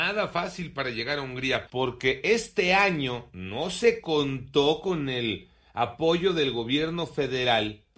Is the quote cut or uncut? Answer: cut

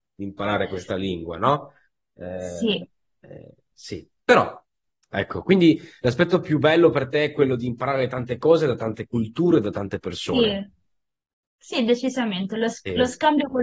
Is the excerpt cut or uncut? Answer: uncut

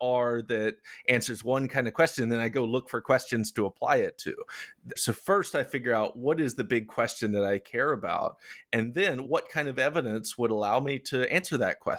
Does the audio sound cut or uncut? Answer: cut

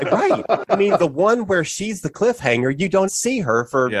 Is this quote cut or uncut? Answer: cut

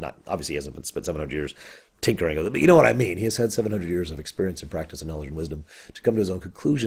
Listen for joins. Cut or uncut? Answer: uncut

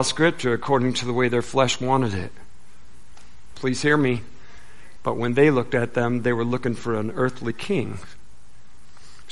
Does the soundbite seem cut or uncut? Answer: cut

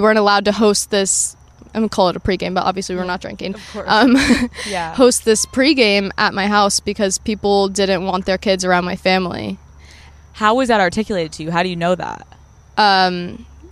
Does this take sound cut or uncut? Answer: uncut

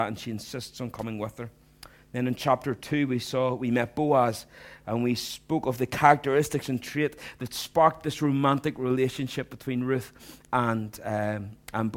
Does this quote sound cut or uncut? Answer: uncut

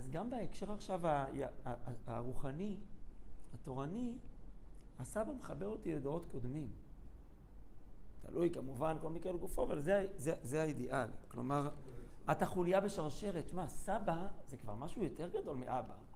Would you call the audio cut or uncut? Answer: uncut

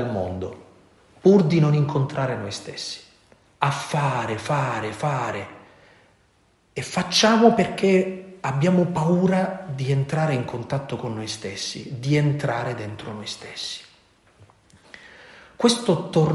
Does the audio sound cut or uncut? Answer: uncut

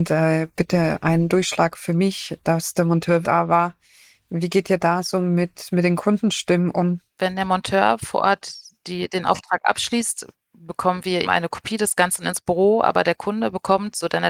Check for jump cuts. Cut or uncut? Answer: cut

